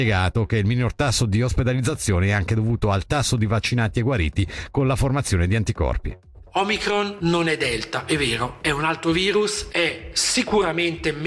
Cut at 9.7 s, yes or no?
yes